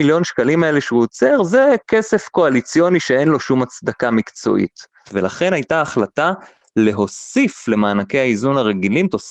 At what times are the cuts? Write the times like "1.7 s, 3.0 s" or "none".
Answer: 5.1 s